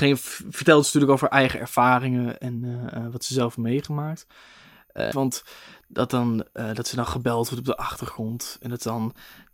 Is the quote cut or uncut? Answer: cut